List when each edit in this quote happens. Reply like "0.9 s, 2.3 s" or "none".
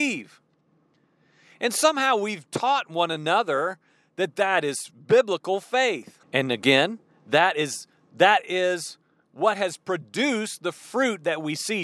6.2 s